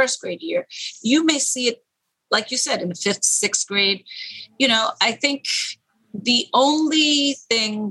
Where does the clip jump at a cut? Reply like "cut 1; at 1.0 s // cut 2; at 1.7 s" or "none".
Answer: none